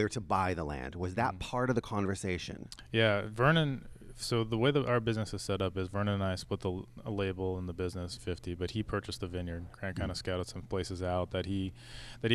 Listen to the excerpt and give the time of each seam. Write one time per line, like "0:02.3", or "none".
0:08.2
0:09.7